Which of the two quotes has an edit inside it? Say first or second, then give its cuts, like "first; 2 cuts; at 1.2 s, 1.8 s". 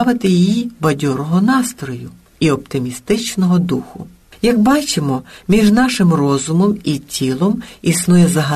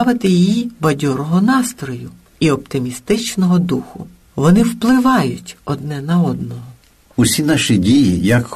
second; 1 cut; at 4.3 s